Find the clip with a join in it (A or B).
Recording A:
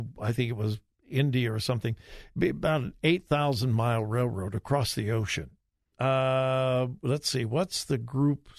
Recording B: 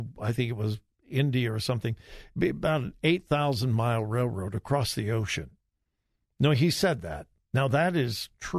A